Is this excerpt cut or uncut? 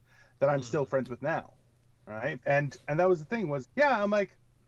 cut